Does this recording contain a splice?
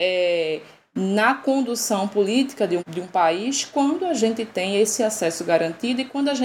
yes; 1 cut; at 2.8 s

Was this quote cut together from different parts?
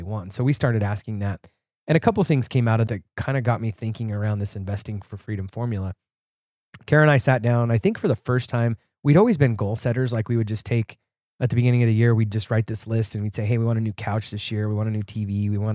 yes; 1 cut; at 2.9 s

